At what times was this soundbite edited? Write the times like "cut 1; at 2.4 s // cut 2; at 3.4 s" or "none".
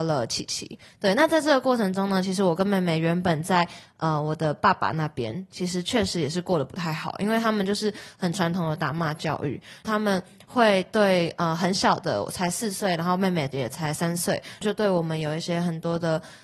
none